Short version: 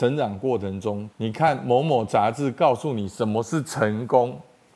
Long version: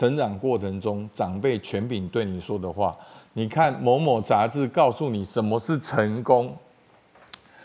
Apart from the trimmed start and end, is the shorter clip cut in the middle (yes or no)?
yes